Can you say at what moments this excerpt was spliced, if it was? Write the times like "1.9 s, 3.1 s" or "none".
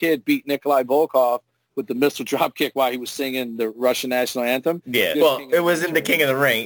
5.1 s